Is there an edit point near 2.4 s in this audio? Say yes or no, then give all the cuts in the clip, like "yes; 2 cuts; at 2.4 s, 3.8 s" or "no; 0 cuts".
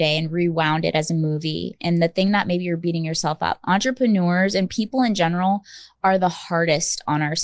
no; 0 cuts